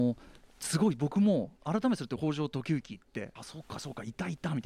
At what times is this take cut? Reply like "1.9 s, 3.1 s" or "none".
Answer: 3.4 s

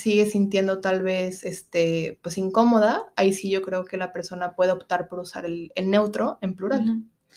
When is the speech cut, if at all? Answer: none

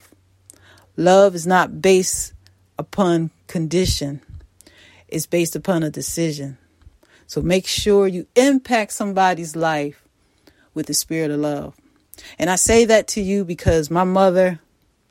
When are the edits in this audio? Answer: none

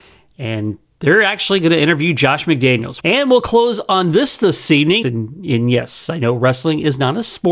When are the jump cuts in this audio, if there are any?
3.0 s, 5.0 s

